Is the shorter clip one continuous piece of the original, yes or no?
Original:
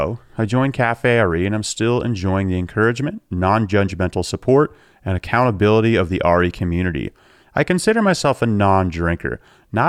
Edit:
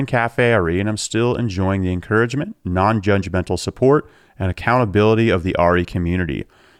yes